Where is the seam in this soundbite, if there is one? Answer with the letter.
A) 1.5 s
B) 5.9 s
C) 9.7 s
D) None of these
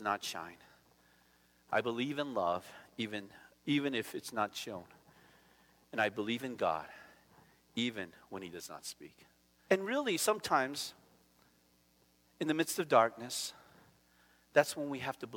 C